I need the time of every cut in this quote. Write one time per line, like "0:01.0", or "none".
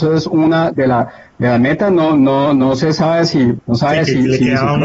0:03.6